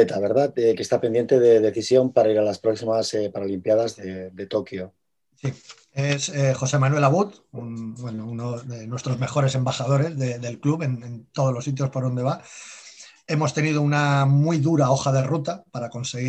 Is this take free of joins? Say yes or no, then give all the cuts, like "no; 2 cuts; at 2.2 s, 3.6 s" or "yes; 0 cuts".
yes; 0 cuts